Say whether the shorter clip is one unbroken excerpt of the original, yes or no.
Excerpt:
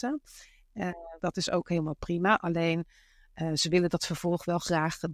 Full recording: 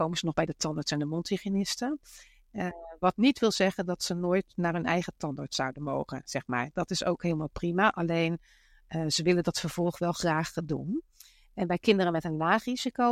no